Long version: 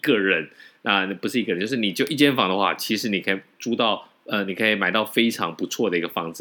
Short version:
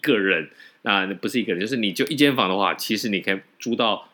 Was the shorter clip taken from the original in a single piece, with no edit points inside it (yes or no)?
yes